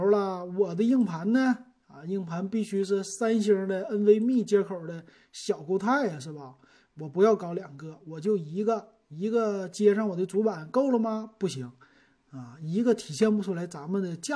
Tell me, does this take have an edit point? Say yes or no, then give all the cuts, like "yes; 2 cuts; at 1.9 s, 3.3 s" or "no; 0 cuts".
no; 0 cuts